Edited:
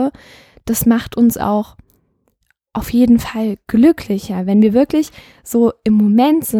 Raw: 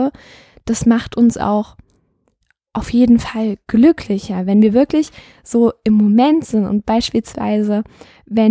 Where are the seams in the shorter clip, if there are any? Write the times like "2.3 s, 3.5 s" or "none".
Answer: none

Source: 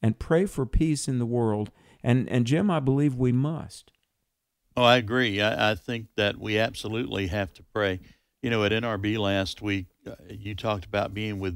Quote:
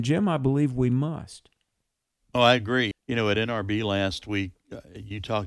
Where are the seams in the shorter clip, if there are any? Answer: 2.9 s

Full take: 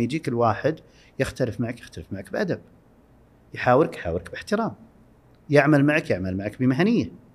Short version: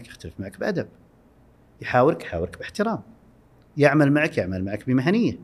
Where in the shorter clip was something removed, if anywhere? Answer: none

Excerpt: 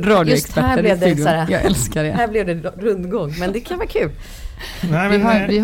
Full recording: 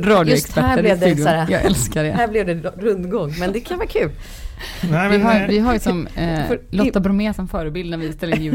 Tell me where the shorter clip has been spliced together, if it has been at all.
none

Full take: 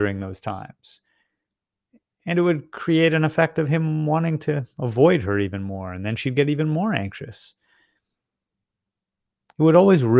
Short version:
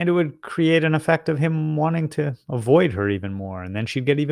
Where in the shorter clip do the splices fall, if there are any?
none

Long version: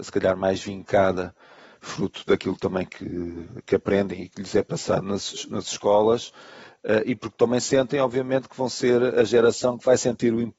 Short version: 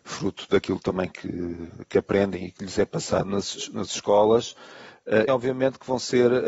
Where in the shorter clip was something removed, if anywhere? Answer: 5.3 s

